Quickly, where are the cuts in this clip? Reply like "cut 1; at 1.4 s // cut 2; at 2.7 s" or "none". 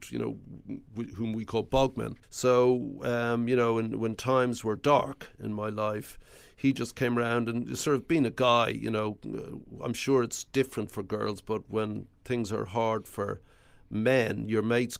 cut 1; at 2.2 s